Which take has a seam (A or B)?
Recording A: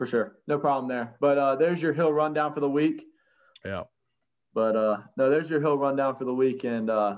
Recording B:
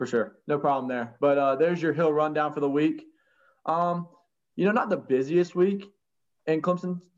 A